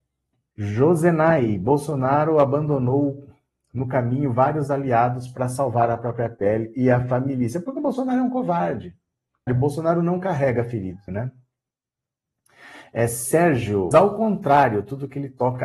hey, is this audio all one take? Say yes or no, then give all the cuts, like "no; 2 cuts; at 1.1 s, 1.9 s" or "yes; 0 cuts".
no; 3 cuts; at 9.5 s, 11.1 s, 13.9 s